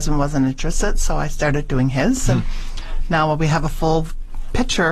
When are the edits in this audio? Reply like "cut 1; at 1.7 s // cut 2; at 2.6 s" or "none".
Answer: none